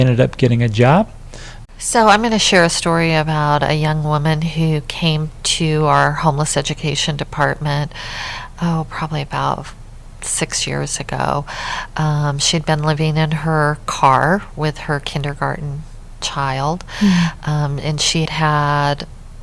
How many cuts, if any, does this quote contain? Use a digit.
2